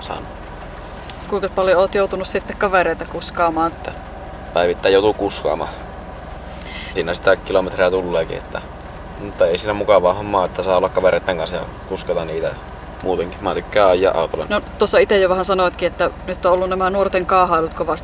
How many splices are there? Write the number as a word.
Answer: three